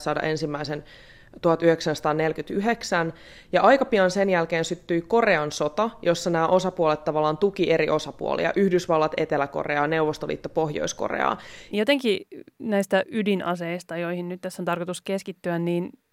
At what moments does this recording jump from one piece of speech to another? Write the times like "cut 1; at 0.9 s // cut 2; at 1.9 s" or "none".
cut 1; at 11.7 s

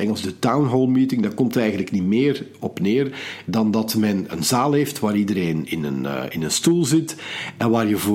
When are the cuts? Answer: cut 1; at 4.3 s

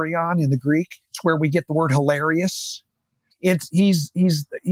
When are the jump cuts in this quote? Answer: cut 1; at 3.3 s

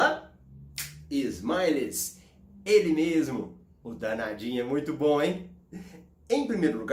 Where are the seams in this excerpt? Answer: none

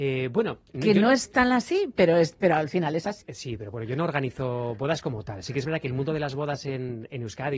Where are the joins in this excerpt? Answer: none

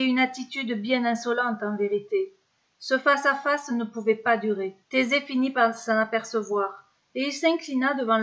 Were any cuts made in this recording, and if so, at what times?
cut 1; at 4.8 s

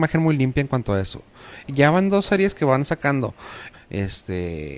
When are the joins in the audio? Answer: cut 1; at 1.6 s // cut 2; at 3.7 s

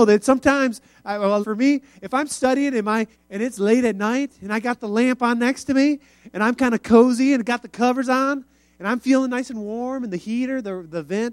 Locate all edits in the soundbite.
cut 1; at 1.4 s // cut 2; at 3.1 s

